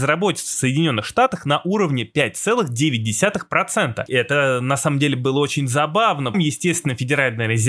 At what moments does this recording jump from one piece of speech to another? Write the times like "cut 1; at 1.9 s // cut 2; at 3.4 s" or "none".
cut 1; at 4.1 s // cut 2; at 6.3 s